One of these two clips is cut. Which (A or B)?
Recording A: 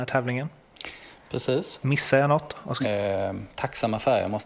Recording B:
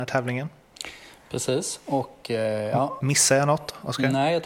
A